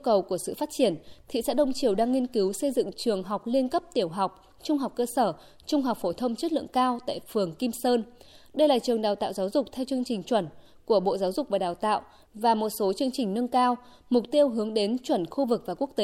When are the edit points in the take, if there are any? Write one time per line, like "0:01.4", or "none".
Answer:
none